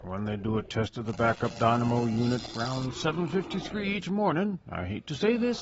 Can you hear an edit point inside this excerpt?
no; 0 cuts

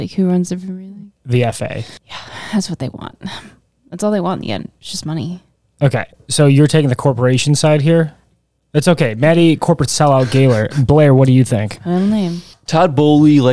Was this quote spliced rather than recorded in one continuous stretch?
no; 0 cuts

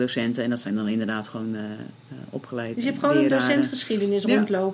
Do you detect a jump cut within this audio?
yes; 1 cut; at 2.7 s

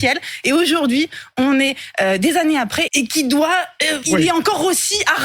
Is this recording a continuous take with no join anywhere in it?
no; 2 cuts; at 2.9 s, 4.0 s

